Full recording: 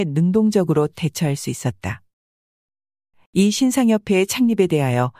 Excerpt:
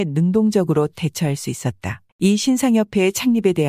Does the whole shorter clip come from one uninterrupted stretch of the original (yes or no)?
no